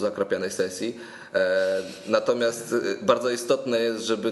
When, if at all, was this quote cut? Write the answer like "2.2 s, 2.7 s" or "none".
none